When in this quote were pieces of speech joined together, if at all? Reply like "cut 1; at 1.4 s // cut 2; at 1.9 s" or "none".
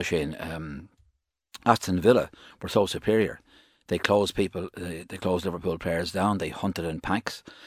none

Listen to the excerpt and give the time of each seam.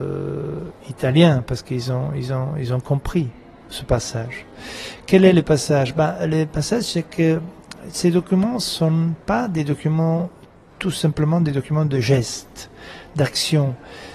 none

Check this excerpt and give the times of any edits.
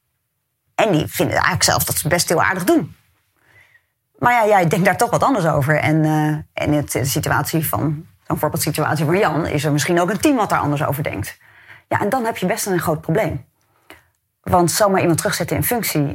none

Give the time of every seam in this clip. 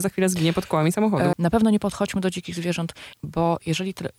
cut 1; at 1.3 s // cut 2; at 3.1 s

